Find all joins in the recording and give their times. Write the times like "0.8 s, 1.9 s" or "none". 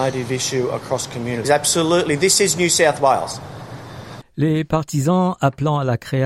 1.4 s, 4.2 s